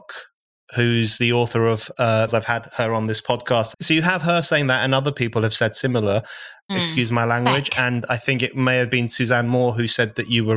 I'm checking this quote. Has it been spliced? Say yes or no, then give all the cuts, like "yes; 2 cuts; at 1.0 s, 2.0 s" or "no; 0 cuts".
yes; 3 cuts; at 2.3 s, 3.7 s, 6.7 s